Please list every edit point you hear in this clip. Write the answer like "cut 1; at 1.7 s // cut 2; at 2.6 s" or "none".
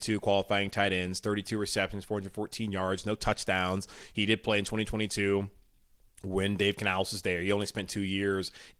none